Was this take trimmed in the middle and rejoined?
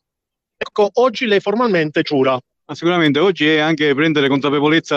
yes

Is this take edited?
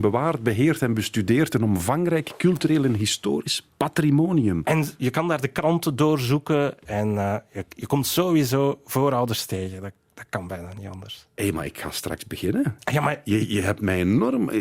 no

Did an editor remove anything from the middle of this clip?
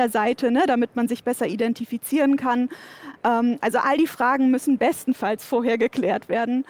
no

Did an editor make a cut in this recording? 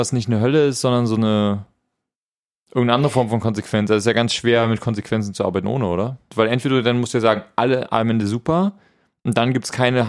yes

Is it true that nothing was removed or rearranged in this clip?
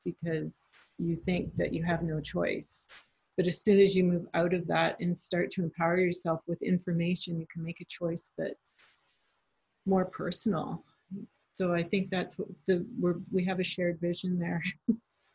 yes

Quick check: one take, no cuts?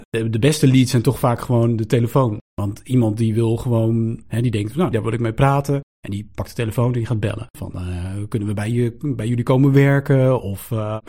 no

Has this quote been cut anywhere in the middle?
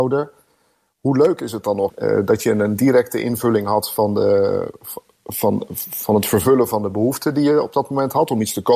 yes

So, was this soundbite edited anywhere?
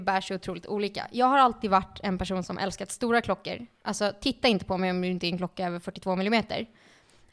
no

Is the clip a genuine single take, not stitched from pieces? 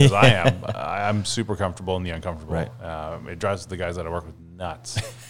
yes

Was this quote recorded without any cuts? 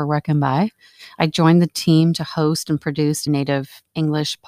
no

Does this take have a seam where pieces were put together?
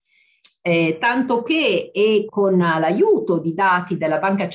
yes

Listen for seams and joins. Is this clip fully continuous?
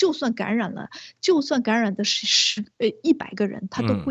yes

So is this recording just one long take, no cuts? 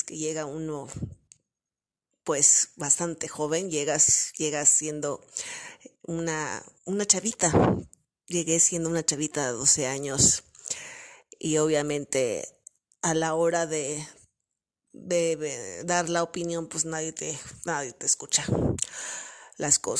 yes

